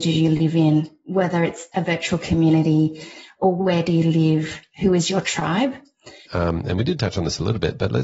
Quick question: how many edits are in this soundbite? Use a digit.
1